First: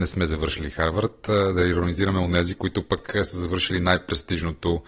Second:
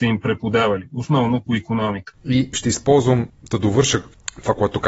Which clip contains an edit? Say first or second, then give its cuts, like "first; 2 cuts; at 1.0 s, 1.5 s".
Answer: second; 1 cut; at 2.1 s